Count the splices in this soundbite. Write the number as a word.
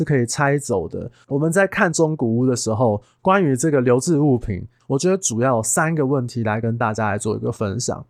two